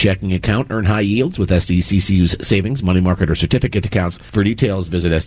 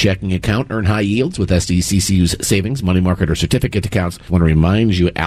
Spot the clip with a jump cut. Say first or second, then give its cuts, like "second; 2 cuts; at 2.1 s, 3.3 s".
second; 1 cut; at 4.3 s